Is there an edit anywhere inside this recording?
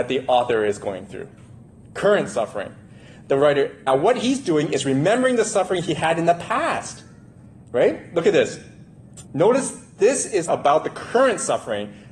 yes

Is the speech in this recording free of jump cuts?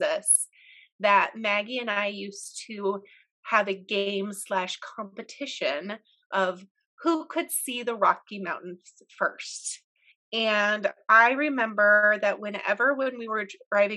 no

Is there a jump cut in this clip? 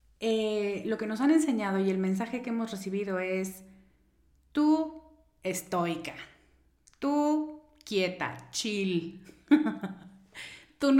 no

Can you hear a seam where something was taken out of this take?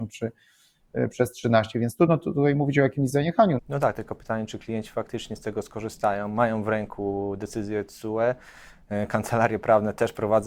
yes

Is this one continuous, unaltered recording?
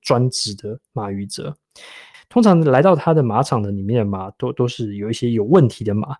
no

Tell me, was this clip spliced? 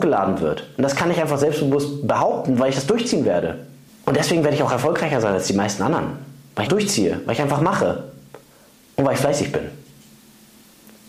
yes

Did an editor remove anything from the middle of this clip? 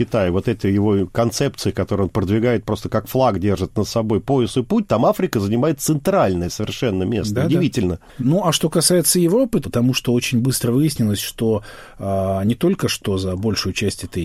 yes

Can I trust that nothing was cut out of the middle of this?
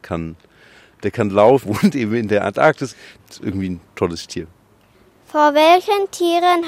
no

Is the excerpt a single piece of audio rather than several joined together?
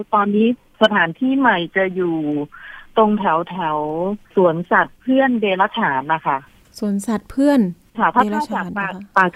no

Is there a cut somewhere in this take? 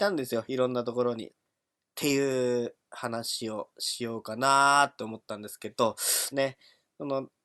yes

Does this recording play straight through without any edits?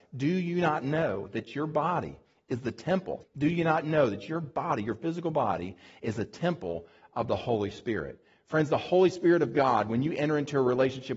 no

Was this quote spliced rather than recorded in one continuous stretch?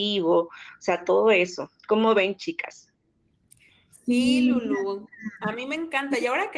no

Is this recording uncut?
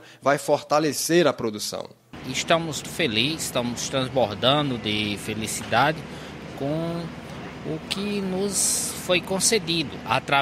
no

